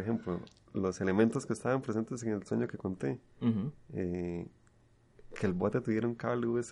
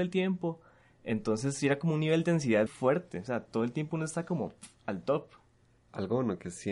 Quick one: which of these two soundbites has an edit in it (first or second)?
second